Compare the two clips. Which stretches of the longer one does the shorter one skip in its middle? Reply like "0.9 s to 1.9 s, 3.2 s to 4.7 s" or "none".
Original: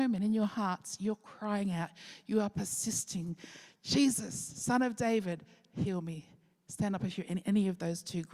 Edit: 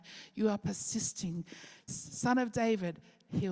3.8 s to 4.3 s